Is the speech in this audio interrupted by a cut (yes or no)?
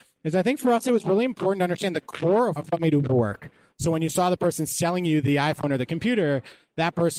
yes